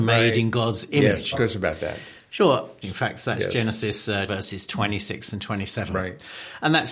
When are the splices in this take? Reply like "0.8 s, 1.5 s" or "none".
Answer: 1.3 s, 2.8 s, 4.3 s